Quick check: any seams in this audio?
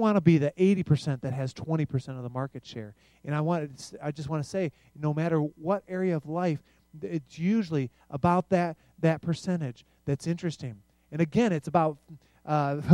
no; 0 cuts

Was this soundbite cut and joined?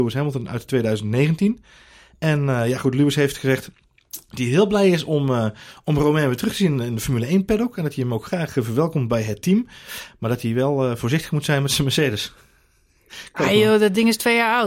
no; 0 cuts

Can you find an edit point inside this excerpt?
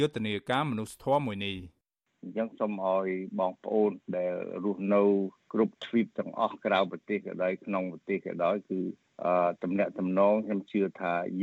no; 0 cuts

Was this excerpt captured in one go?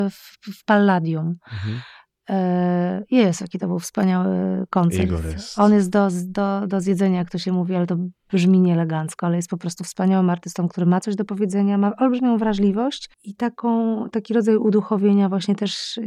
no; 1 cut; at 13.1 s

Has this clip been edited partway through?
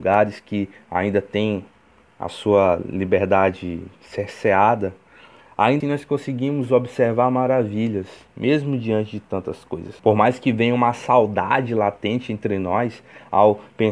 yes; 2 cuts; at 5.8 s, 10.0 s

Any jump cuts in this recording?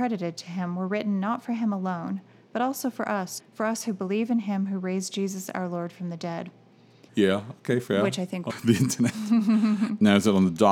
yes; 3 cuts; at 3.4 s, 7.1 s, 8.5 s

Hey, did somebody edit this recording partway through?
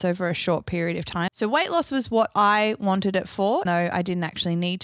yes; 2 cuts; at 1.3 s, 3.7 s

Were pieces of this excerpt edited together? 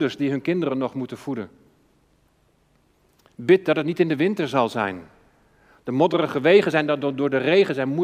no; 0 cuts

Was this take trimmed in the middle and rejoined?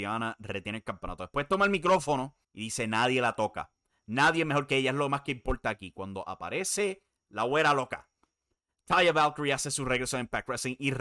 yes; 1 cut; at 2.4 s

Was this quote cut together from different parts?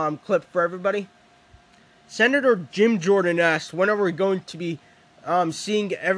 no; 0 cuts

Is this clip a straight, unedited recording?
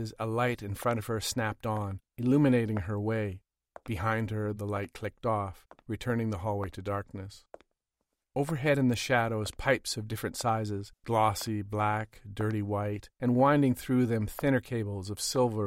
yes; 0 cuts

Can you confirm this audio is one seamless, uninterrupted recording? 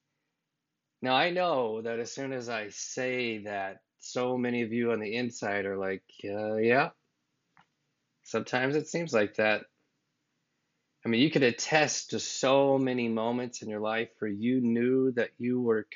yes; 0 cuts

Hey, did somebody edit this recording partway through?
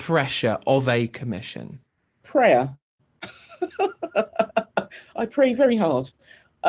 no; 0 cuts

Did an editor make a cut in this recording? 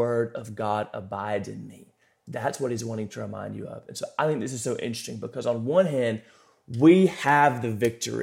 no; 0 cuts

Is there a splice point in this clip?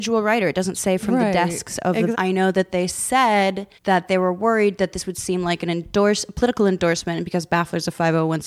yes; 2 cuts; at 2.1 s, 3.8 s

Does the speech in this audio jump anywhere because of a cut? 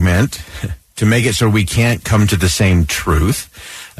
no; 0 cuts

